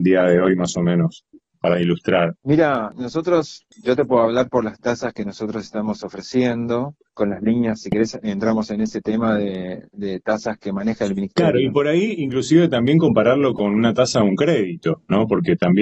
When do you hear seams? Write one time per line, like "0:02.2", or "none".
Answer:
0:10.6